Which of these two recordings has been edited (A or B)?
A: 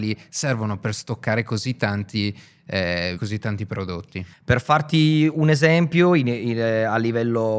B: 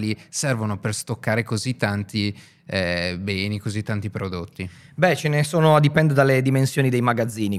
A